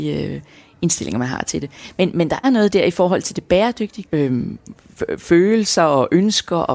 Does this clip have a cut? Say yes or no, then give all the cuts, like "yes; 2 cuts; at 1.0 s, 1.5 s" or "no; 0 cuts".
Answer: yes; 2 cuts; at 2.4 s, 4.1 s